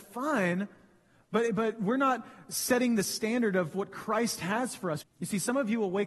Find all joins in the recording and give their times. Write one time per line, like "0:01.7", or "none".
0:05.0